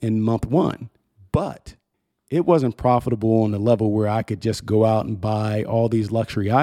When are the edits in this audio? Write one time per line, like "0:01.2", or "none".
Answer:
none